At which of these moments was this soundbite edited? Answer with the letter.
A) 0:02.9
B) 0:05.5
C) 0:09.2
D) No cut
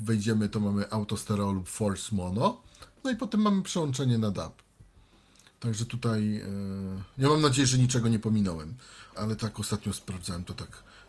C